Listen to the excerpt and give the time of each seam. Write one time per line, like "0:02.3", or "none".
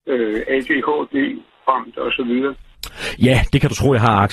none